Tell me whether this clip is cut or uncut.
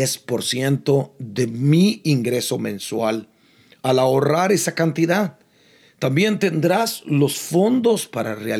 uncut